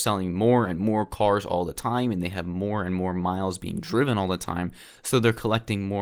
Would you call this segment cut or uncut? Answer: uncut